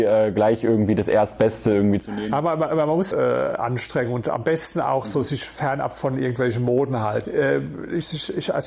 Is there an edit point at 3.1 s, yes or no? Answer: yes